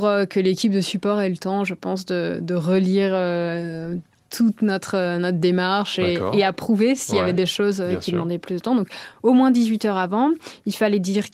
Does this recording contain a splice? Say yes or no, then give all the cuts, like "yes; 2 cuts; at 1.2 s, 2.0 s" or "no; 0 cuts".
no; 0 cuts